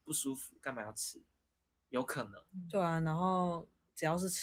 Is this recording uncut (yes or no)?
yes